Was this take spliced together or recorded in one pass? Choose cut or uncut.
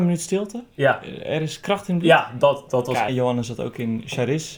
cut